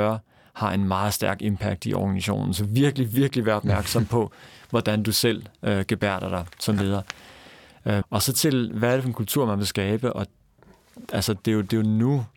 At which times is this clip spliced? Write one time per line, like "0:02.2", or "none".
0:08.0